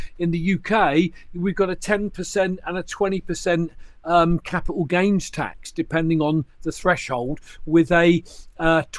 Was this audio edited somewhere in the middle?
no; 0 cuts

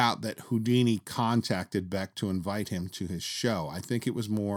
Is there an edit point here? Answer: no; 0 cuts

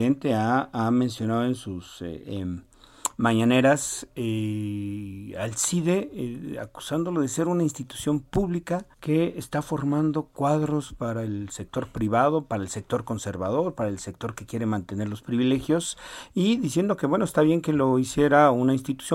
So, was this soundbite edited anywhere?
yes; 1 cut; at 8.9 s

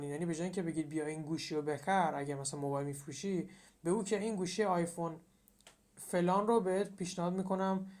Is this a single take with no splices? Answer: yes; 0 cuts

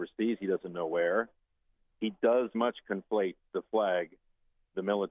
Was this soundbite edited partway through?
yes; 1 cut; at 2.5 s

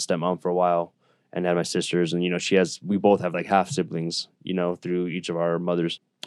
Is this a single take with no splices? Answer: yes; 0 cuts

